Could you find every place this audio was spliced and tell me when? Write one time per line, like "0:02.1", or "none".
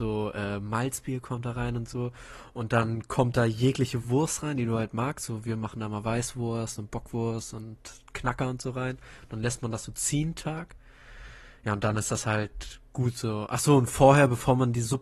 none